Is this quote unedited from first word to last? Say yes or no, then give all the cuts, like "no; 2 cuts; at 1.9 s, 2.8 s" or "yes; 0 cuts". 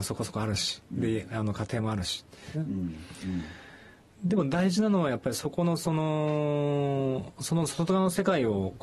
no; 1 cut; at 2.5 s